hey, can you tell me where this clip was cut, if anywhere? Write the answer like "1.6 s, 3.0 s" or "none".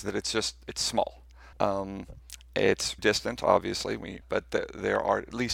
1.5 s, 3.0 s, 4.2 s